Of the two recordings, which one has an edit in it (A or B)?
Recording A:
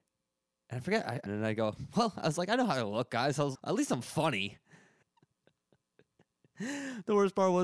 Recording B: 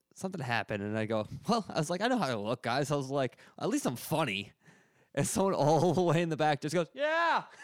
A